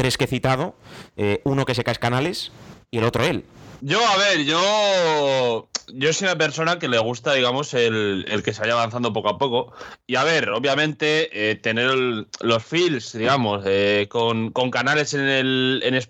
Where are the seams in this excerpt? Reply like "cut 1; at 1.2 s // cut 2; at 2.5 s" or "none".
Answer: cut 1; at 3.8 s